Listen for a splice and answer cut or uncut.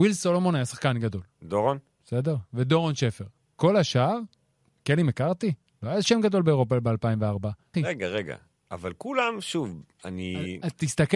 cut